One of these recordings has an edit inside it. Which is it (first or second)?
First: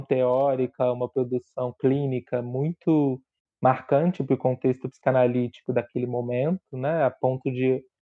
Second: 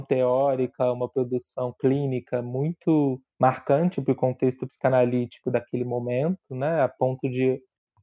second